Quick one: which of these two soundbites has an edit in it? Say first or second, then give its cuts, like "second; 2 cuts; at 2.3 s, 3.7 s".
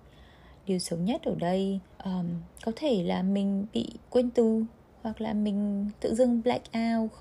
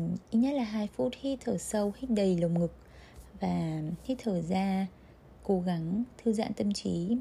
first; 2 cuts; at 1.9 s, 4.0 s